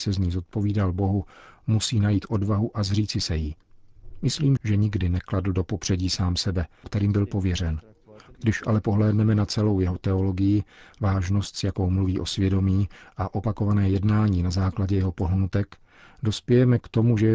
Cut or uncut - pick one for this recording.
cut